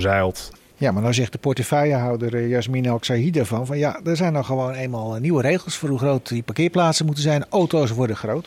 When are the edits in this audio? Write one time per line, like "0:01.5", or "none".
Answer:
none